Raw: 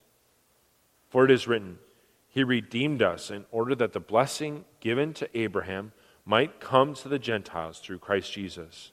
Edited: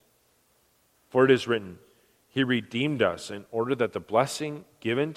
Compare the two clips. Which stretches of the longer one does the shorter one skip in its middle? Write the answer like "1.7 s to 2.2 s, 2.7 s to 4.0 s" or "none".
none